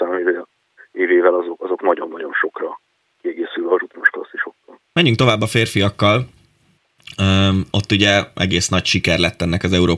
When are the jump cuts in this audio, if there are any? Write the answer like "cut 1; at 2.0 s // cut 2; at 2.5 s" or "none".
cut 1; at 3.2 s // cut 2; at 4.9 s